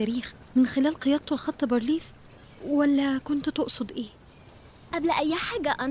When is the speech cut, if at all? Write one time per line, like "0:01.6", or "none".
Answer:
0:04.9